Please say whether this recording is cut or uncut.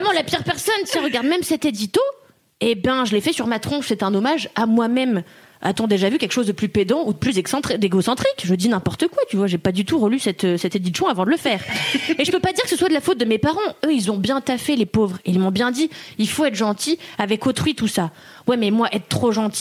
uncut